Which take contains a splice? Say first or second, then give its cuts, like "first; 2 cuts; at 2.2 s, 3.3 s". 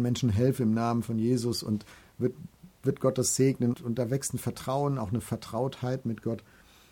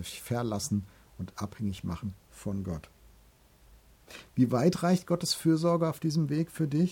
first; 1 cut; at 3.7 s